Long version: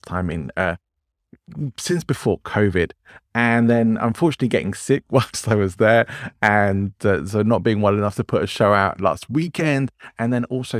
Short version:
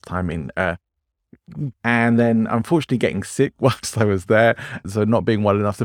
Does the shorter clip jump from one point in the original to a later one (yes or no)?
yes